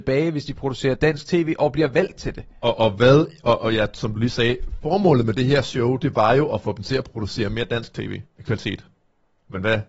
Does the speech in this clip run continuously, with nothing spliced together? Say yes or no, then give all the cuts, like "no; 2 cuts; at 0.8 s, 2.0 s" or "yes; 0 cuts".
no; 1 cut; at 8.3 s